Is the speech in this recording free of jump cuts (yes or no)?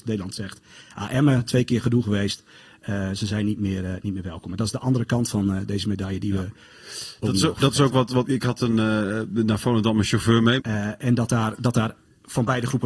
no